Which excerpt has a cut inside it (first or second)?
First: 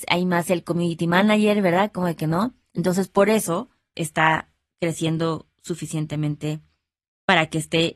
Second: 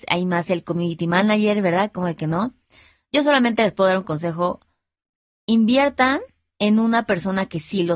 first